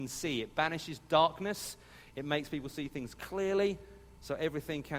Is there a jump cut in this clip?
no; 0 cuts

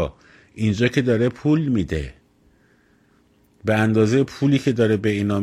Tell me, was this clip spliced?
no; 0 cuts

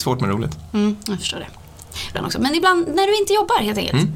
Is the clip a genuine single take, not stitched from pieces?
no; 1 cut; at 2.1 s

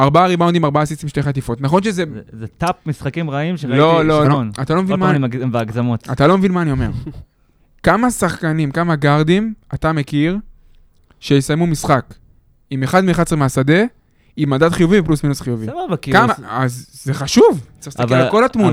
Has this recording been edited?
yes; 3 cuts; at 4.2 s, 16.3 s, 17.8 s

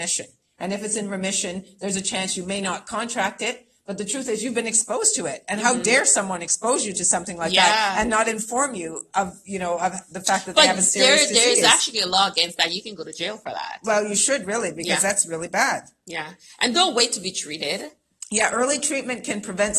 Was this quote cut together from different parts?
no; 0 cuts

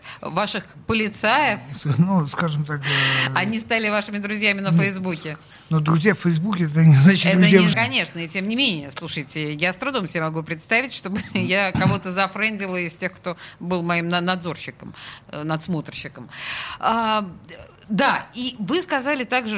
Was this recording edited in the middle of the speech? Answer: yes; 1 cut; at 7.7 s

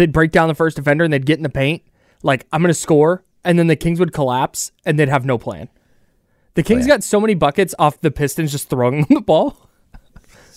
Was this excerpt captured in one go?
yes; 0 cuts

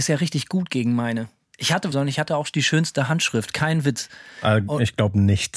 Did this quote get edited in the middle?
yes; 1 cut; at 1.9 s

